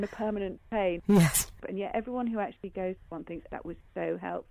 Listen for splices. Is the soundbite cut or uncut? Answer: cut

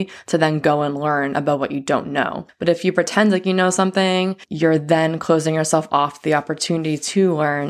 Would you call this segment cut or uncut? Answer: uncut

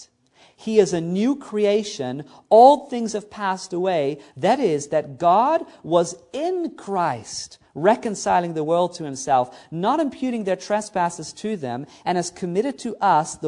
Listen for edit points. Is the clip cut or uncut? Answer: cut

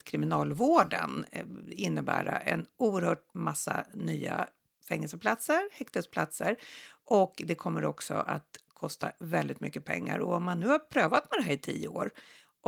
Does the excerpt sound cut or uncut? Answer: uncut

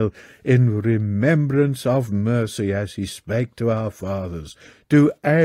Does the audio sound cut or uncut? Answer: uncut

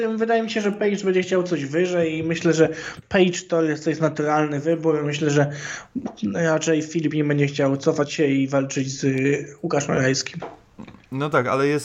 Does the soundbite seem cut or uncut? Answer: uncut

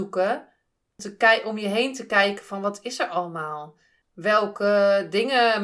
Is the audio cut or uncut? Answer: cut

